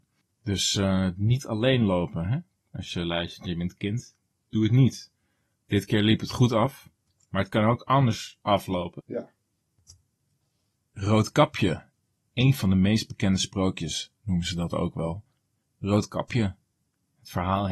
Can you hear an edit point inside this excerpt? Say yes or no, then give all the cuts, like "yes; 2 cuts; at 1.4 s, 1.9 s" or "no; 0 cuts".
yes; 1 cut; at 9.0 s